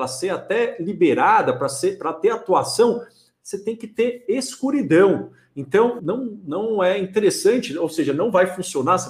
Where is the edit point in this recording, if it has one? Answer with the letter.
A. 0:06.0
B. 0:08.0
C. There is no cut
A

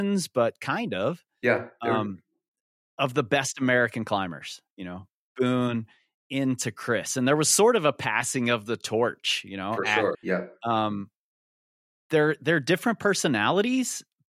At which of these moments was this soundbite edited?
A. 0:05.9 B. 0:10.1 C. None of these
B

